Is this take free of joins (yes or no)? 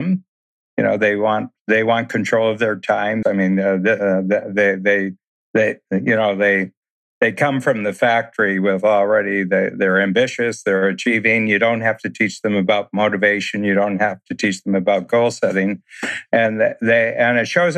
no